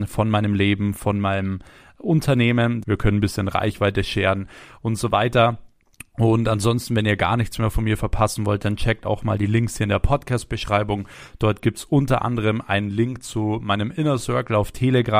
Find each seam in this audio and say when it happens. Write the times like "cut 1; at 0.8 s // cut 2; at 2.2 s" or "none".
cut 1; at 2.8 s